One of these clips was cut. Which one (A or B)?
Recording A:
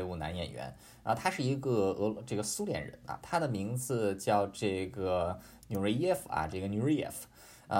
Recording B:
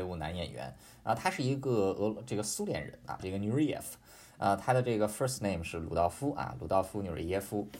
B